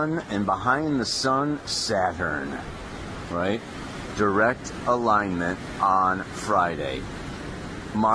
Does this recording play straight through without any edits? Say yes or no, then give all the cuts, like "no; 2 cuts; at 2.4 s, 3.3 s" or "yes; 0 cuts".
yes; 0 cuts